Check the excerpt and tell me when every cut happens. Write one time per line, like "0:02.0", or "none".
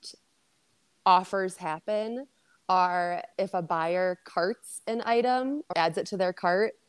0:03.3
0:05.7